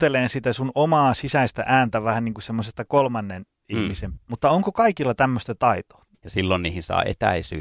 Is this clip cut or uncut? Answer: cut